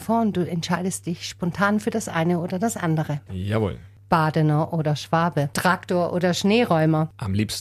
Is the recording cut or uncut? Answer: cut